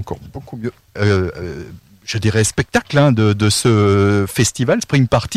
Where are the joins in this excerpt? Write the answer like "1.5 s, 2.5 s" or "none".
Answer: 1.0 s